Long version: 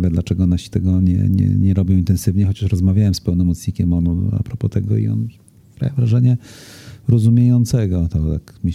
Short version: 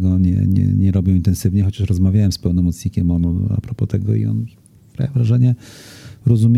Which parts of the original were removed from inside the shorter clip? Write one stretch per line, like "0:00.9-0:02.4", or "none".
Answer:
none